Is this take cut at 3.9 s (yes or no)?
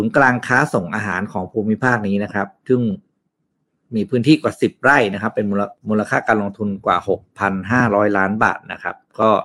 no